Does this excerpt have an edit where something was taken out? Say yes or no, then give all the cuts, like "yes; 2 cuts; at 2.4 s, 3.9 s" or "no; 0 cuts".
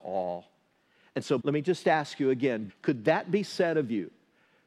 yes; 2 cuts; at 1.4 s, 2.7 s